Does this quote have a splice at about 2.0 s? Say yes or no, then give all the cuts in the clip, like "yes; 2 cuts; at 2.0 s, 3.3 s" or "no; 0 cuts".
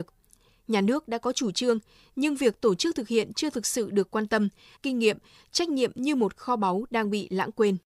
no; 1 cut; at 4.8 s